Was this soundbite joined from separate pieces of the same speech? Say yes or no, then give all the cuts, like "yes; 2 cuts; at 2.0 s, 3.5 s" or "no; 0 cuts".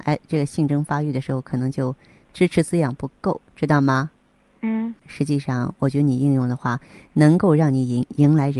yes; 1 cut; at 5.0 s